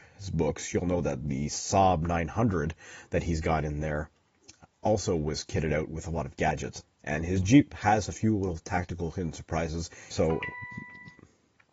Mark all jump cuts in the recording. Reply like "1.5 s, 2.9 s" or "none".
6.8 s, 10.1 s